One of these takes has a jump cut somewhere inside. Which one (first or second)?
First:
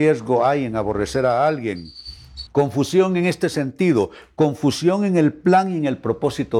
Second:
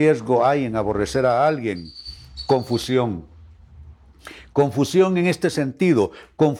first